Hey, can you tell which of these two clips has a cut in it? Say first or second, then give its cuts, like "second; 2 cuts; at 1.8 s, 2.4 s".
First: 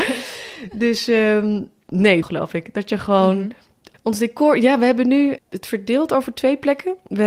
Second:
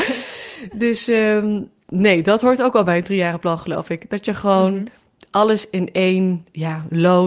first; 3 cuts; at 2.2 s, 3.9 s, 5.4 s